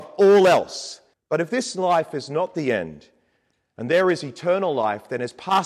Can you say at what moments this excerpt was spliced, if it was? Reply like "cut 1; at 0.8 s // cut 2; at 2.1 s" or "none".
cut 1; at 1.1 s